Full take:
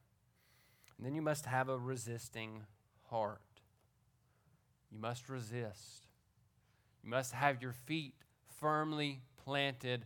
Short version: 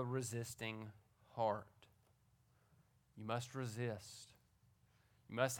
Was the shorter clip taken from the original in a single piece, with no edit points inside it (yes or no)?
yes